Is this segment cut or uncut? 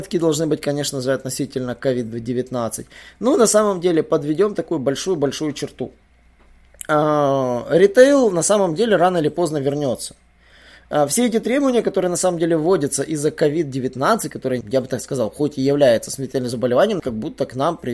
cut